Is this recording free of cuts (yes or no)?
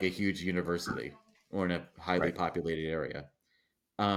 yes